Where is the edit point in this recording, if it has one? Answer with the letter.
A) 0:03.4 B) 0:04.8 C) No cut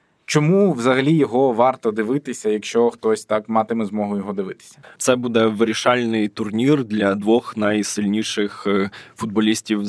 B